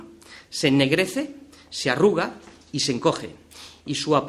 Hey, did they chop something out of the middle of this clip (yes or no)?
no